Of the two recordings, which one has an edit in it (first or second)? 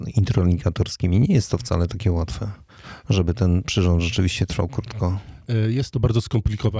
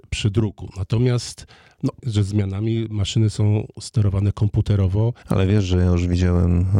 second